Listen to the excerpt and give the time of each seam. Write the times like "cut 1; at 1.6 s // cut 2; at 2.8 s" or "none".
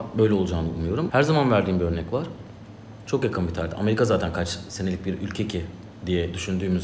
cut 1; at 1.1 s // cut 2; at 3.1 s